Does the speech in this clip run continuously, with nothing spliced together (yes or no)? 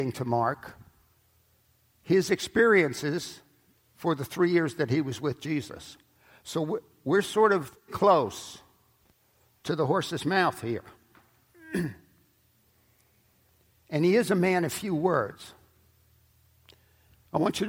no